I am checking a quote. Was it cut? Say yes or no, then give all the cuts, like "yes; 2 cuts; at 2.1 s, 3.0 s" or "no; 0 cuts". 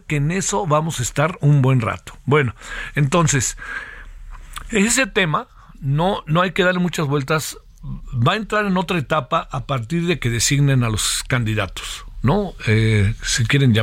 no; 0 cuts